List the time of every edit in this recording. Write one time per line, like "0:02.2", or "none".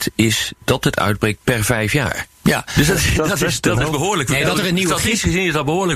none